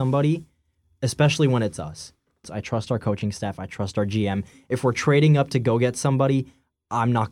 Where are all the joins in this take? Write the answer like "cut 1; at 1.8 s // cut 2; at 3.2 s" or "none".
cut 1; at 2.4 s